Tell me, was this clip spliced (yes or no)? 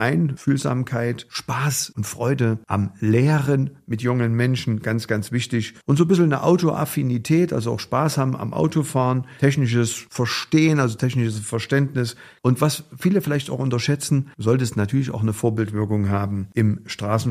no